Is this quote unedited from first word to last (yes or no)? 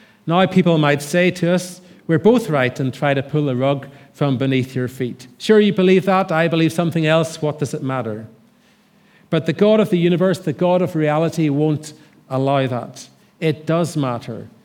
yes